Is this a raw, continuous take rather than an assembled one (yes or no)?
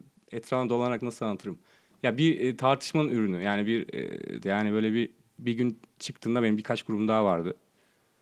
no